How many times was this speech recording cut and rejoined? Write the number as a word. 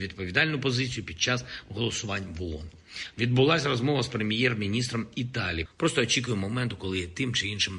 two